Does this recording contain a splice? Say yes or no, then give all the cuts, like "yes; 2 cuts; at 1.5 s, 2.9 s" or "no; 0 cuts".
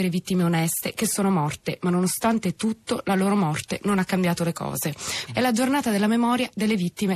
yes; 1 cut; at 5.3 s